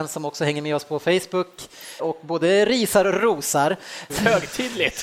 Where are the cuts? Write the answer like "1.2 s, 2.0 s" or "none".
2.0 s, 4.1 s